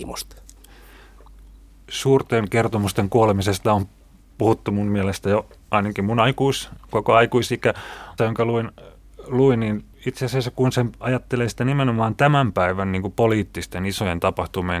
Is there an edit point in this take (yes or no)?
yes